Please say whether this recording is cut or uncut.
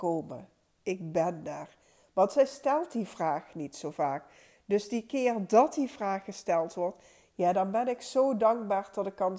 uncut